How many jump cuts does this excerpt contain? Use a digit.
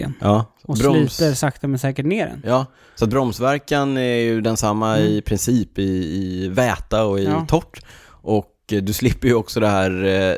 0